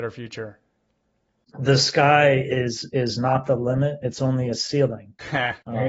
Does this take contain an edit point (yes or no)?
no